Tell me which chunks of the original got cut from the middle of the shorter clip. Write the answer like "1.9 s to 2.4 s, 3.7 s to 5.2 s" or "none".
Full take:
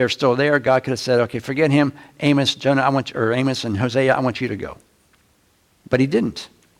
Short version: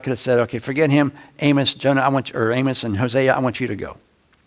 none